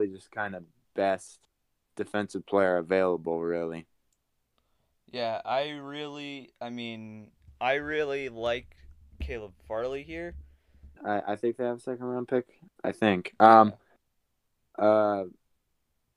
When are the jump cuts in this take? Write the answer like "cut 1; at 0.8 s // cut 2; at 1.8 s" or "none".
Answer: cut 1; at 11.0 s